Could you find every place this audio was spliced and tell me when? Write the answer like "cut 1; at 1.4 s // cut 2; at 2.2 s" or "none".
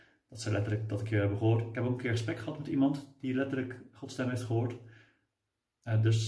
none